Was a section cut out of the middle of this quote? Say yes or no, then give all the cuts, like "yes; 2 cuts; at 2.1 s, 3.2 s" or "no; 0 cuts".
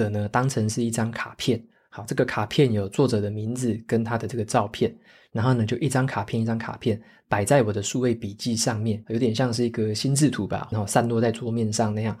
yes; 2 cuts; at 9.0 s, 10.7 s